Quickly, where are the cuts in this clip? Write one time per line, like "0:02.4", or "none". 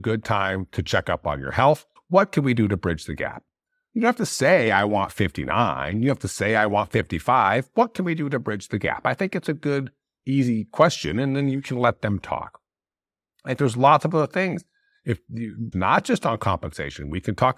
0:02.0
0:15.7